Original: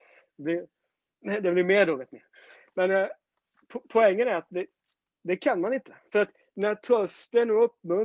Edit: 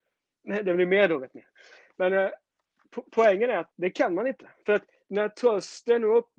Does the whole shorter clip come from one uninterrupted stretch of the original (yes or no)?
no